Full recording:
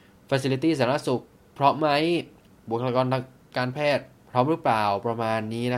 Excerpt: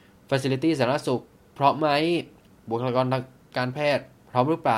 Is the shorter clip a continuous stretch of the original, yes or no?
yes